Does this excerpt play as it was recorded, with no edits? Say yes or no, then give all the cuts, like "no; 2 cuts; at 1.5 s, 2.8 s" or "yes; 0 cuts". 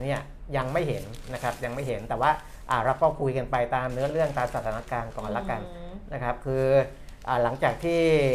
yes; 0 cuts